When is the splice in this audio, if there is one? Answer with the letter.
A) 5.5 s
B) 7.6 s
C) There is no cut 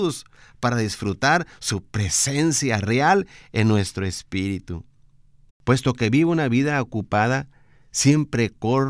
A